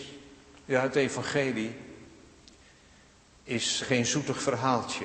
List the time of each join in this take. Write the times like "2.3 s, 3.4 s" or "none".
3.8 s